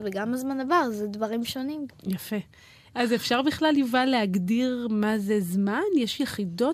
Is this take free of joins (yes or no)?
yes